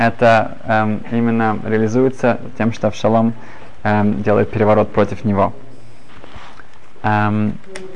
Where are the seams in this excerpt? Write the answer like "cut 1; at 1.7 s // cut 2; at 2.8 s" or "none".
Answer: none